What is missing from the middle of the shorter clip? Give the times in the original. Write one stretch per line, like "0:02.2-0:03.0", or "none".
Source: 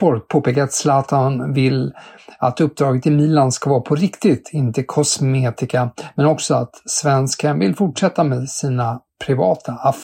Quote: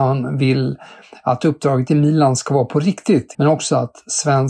0:04.5-0:06.1